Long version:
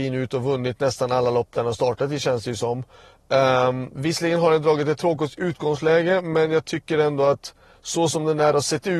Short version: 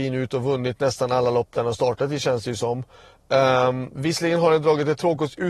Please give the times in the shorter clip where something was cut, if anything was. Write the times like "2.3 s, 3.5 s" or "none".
none